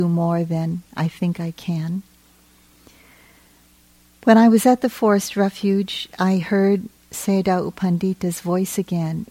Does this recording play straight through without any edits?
yes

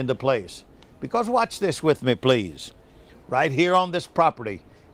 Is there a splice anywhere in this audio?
yes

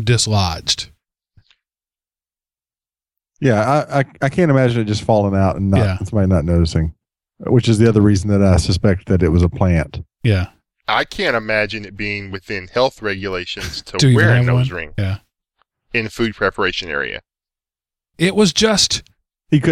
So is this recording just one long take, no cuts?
no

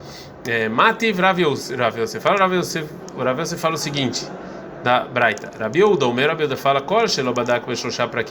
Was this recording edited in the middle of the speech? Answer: no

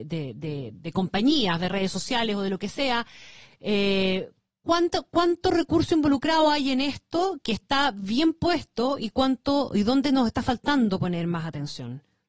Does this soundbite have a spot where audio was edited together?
no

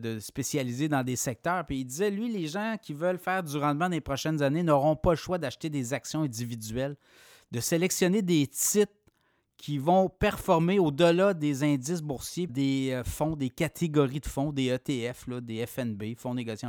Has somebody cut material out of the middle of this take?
yes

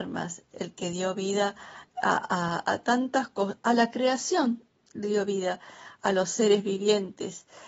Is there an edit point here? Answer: no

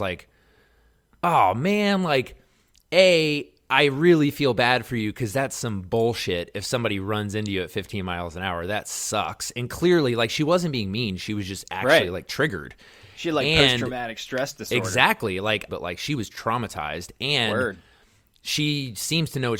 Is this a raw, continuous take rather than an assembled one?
no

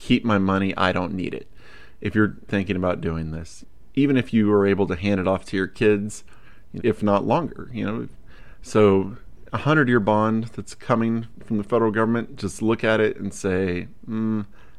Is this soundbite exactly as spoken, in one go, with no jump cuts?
no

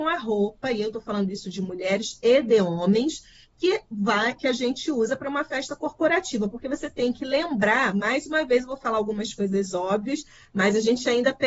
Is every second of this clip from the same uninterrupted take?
yes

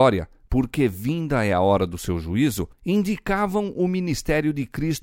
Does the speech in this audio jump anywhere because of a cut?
yes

